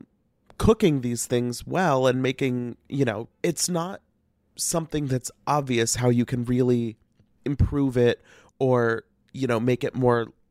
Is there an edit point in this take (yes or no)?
yes